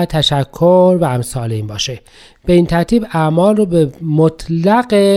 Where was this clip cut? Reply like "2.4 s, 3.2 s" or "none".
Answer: none